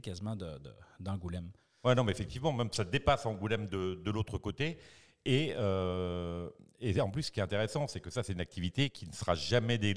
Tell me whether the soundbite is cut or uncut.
uncut